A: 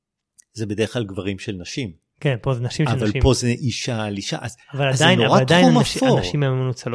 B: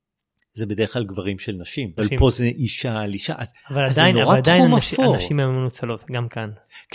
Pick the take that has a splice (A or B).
B